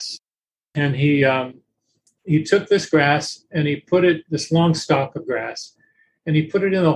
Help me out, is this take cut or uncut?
uncut